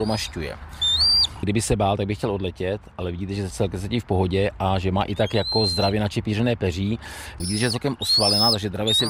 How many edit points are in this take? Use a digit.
2